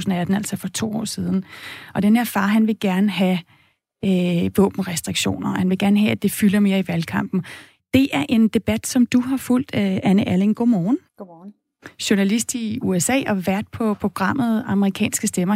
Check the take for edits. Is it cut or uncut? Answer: cut